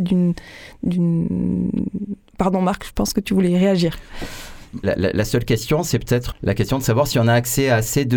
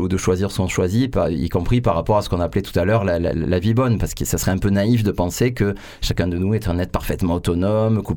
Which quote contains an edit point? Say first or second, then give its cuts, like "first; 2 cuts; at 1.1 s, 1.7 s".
first; 2 cuts; at 4.8 s, 6.3 s